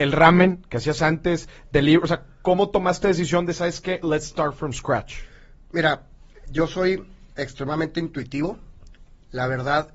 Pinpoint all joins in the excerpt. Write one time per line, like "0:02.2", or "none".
none